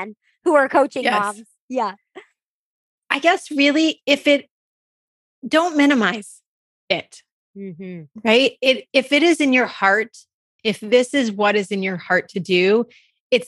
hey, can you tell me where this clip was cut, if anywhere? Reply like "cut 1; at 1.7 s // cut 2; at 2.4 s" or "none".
none